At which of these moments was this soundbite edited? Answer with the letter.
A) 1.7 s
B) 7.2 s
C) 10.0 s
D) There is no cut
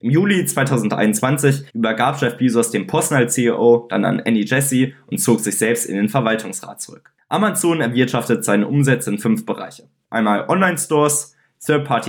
A